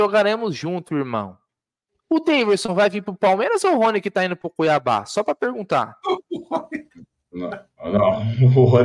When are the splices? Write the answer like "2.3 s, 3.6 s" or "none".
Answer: none